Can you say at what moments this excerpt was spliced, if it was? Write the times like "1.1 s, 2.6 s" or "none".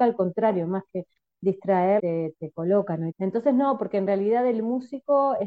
2.0 s, 3.1 s